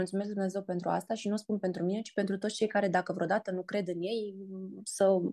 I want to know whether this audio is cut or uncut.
uncut